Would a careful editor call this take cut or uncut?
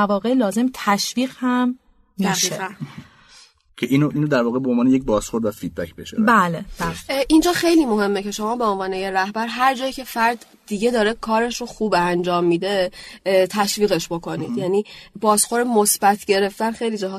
uncut